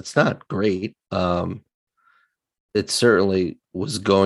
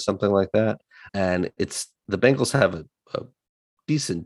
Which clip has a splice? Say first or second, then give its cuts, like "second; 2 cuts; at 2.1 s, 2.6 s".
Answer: second; 1 cut; at 1.1 s